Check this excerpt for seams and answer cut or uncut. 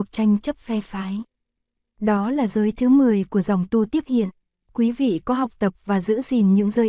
uncut